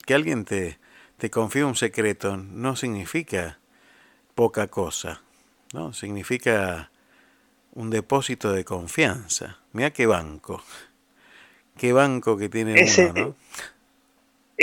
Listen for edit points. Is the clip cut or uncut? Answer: uncut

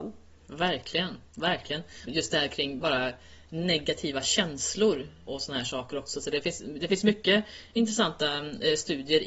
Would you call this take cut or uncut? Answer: cut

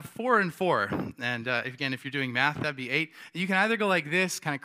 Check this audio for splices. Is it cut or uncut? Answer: uncut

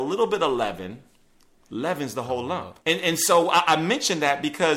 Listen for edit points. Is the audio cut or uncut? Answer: cut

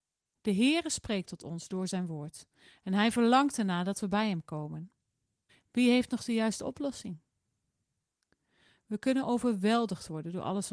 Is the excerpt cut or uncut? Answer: cut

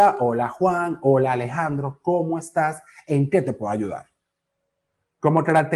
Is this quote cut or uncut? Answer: uncut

